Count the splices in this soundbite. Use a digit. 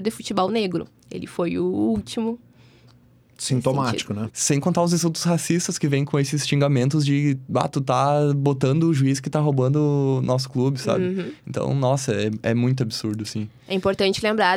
1